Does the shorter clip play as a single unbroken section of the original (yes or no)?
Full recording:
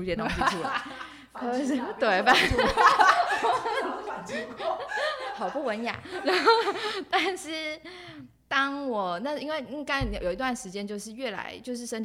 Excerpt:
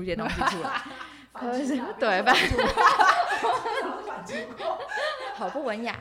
yes